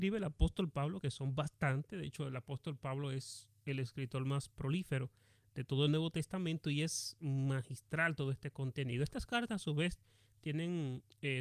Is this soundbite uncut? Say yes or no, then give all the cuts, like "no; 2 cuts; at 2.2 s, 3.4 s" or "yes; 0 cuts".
yes; 0 cuts